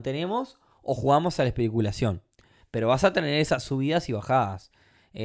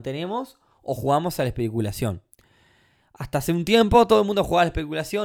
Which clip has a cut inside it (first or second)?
first